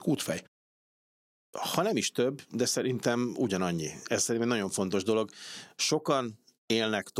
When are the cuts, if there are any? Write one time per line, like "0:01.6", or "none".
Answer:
none